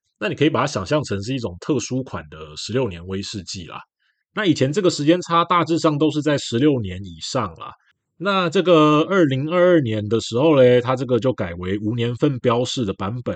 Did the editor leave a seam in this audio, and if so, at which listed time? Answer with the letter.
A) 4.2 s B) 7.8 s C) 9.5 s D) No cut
A